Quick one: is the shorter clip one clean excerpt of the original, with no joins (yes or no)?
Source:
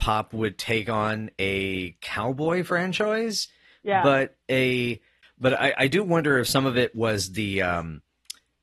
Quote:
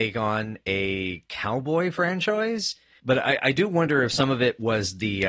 no